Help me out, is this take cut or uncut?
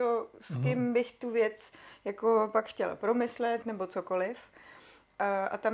cut